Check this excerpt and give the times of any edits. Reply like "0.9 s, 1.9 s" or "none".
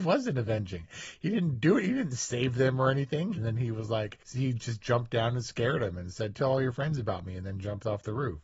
3.4 s, 6.3 s